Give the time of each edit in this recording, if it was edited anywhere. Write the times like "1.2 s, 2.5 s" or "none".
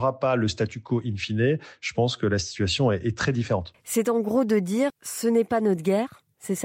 3.7 s, 4.9 s